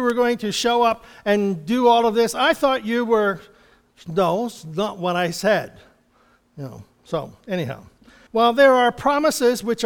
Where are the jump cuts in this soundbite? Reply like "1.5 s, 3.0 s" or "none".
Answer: 8.3 s

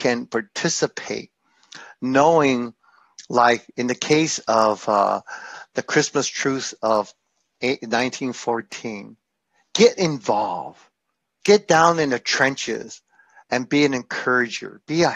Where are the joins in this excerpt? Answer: 11.4 s

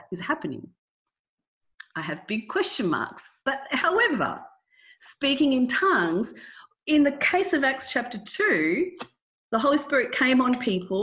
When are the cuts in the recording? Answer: none

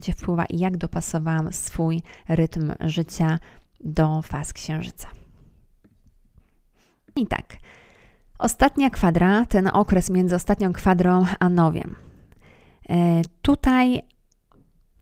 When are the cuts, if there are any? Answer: none

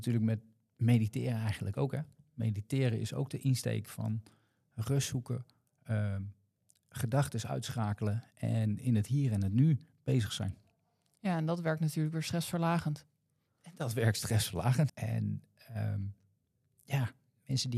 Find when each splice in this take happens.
14.9 s

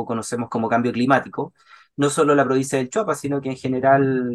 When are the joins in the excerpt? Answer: none

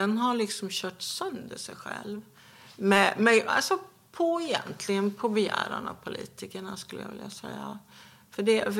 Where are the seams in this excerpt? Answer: none

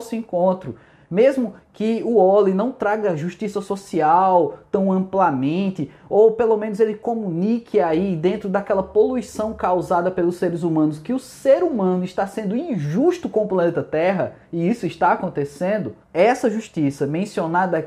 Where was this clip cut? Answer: 16.0 s

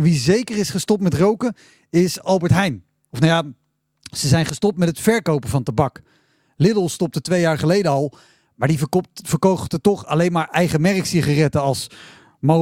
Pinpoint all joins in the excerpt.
none

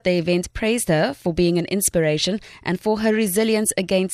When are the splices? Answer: none

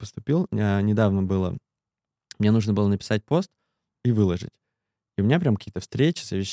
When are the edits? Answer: none

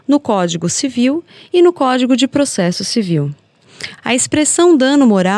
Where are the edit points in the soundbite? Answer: 4.0 s

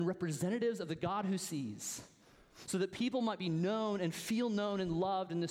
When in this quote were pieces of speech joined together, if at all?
none

